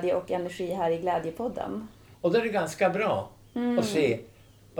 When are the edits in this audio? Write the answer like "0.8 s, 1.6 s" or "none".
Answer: 2.1 s